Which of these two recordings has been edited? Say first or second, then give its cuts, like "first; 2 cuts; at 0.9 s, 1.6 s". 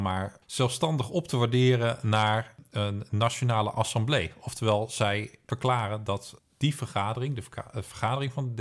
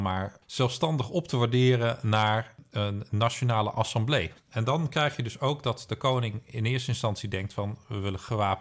second; 1 cut; at 4.3 s